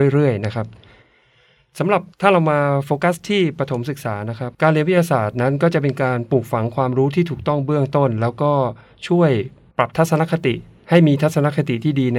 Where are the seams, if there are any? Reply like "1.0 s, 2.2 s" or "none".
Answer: 2.1 s, 4.5 s